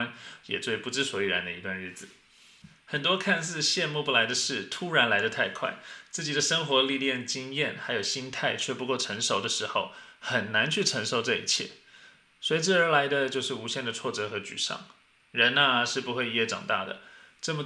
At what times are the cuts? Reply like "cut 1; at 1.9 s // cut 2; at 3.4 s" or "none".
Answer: none